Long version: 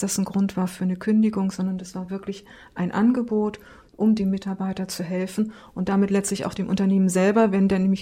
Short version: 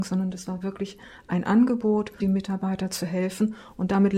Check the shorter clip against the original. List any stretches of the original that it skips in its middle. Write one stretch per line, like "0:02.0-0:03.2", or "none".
0:03.7-0:04.2